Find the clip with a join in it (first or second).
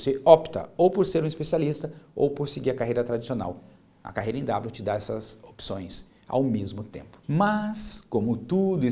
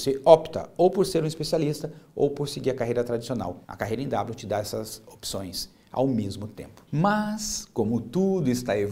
second